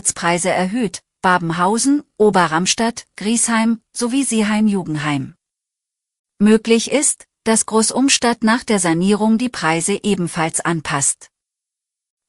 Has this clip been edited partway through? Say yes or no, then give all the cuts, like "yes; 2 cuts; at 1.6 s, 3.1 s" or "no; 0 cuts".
no; 0 cuts